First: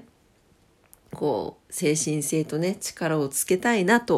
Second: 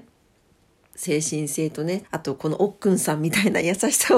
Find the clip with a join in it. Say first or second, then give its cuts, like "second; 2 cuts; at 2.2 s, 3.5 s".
second; 2 cuts; at 0.9 s, 2.0 s